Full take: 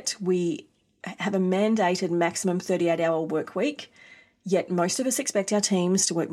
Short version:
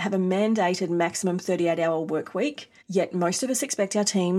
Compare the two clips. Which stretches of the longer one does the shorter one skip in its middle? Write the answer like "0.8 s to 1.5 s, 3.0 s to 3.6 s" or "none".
4.0 s to 4.4 s